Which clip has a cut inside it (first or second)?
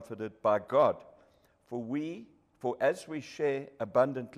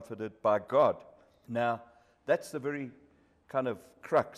second